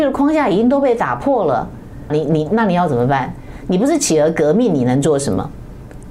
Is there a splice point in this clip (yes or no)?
yes